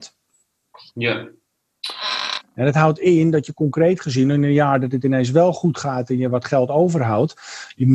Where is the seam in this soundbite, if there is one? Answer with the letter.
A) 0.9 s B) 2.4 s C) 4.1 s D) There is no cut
B